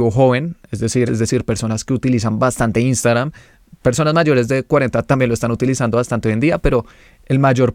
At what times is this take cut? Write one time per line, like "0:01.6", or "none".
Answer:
0:01.1